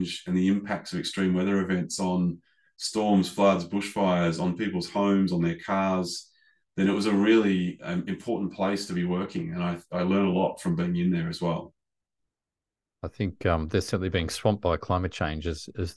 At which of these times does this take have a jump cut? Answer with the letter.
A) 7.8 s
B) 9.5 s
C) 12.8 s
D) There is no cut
D